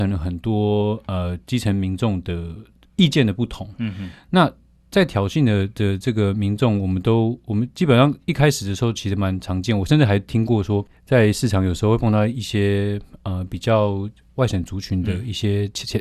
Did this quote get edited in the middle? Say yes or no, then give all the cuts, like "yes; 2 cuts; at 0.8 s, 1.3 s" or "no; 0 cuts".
no; 0 cuts